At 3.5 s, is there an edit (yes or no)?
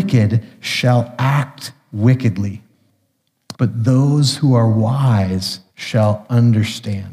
yes